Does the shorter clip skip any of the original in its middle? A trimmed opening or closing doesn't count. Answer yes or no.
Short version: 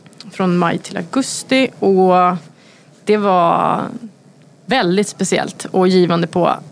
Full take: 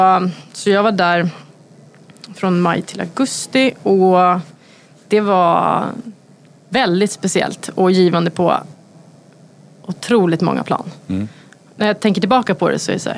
no